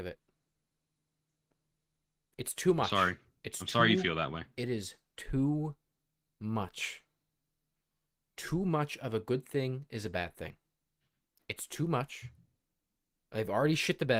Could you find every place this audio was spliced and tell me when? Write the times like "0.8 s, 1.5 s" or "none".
none